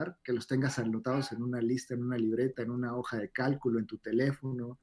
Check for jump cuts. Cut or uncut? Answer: uncut